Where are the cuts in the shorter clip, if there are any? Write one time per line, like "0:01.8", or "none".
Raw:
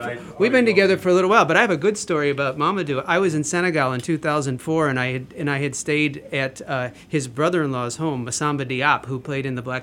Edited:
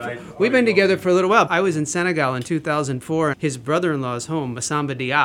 0:01.5
0:03.3